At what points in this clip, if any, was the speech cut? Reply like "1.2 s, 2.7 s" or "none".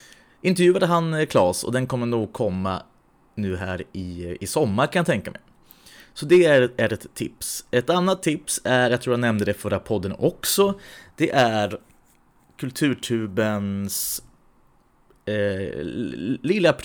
none